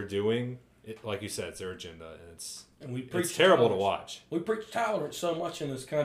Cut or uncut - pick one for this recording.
uncut